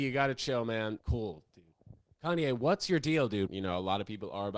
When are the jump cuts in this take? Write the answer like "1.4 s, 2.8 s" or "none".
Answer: 1.0 s, 3.5 s